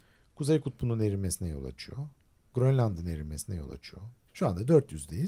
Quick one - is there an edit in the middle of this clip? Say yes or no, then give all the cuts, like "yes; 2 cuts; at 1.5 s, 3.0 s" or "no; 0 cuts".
yes; 1 cut; at 4.3 s